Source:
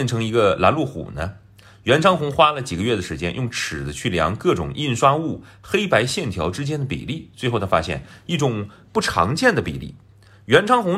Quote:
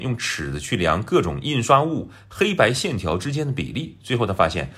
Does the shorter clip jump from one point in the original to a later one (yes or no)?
no